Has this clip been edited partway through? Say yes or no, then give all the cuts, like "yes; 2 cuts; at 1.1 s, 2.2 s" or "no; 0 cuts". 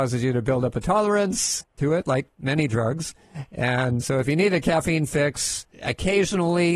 yes; 3 cuts; at 1.6 s, 4.0 s, 5.7 s